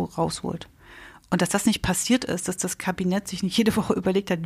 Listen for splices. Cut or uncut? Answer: uncut